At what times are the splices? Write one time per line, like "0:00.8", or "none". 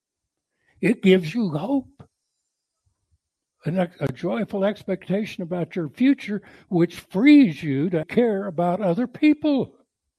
0:08.0